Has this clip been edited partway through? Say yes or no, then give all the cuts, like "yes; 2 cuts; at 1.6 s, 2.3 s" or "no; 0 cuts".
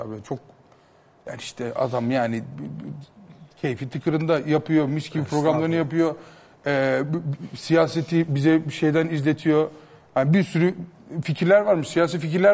no; 0 cuts